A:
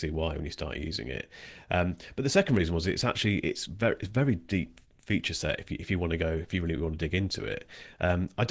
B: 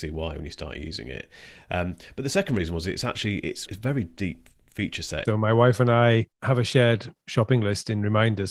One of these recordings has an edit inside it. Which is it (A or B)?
B